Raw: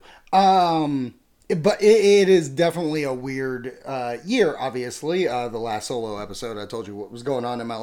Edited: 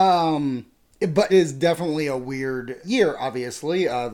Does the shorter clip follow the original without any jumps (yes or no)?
no